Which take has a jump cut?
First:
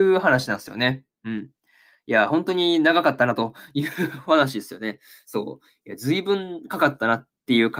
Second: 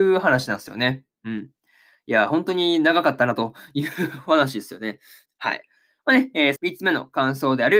second; 2 cuts; at 5.3 s, 6.6 s

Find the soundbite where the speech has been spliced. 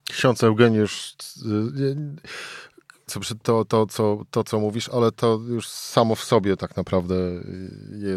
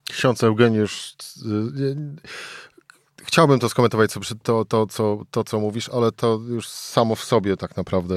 first; 1 cut; at 3.1 s

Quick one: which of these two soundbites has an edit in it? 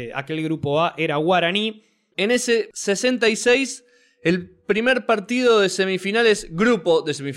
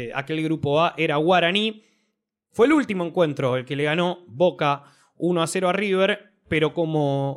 first; 1 cut; at 2.1 s

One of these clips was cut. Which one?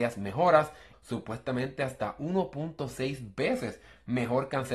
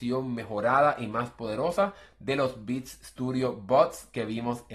first; 1 cut; at 0.9 s

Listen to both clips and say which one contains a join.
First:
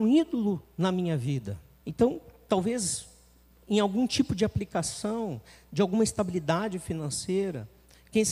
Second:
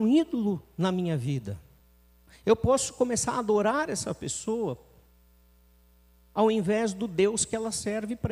first; 1 cut; at 1.8 s

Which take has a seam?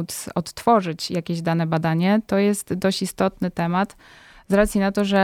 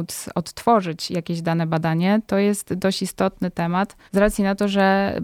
second; 1 cut; at 4.1 s

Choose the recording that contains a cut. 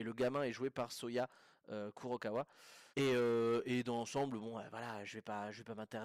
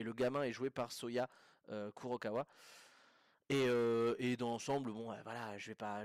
first; 1 cut; at 2.9 s

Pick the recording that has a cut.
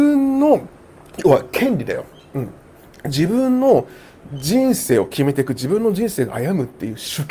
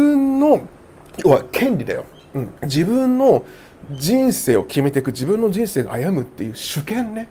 second; 1 cut; at 2.6 s

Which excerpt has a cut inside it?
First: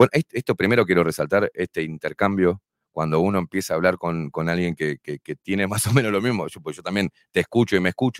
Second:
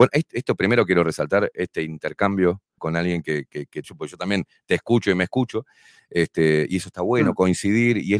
second; 2 cuts; at 2.8 s, 3.8 s

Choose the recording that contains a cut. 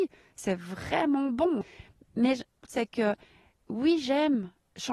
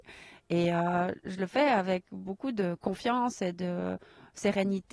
first; 1 cut; at 2.7 s

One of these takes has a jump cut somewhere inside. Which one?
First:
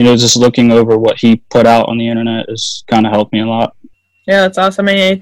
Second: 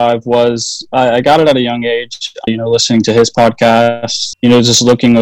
second; 2 cuts; at 2.5 s, 4.3 s

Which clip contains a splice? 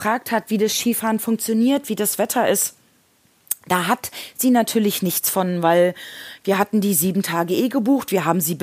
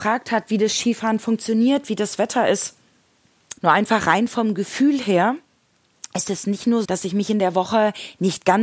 second; 2 cuts; at 3.6 s, 6.8 s

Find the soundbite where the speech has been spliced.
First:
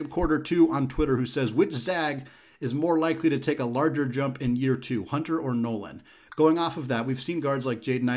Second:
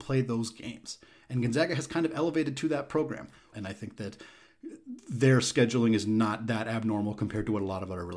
second; 1 cut; at 3.5 s

